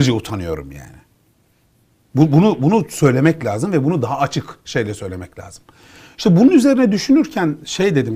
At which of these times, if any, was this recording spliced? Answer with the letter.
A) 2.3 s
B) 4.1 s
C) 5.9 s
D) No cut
D